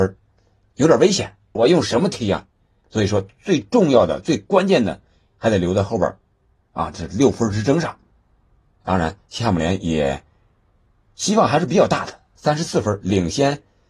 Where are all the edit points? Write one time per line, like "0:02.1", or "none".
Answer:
0:01.6